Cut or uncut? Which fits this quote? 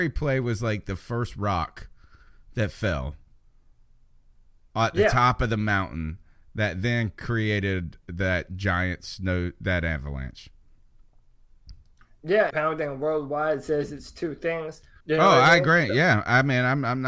cut